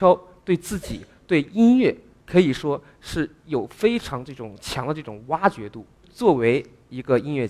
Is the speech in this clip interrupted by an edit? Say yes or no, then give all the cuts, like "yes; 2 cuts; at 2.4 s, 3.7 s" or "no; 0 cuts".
yes; 1 cut; at 6.0 s